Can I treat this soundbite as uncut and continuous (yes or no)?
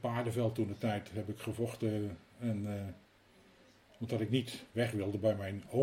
yes